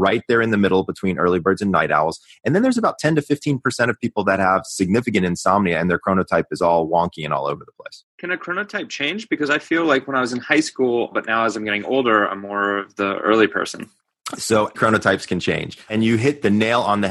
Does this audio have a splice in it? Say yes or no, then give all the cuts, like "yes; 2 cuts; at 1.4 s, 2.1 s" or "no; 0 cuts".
yes; 2 cuts; at 11.1 s, 14.7 s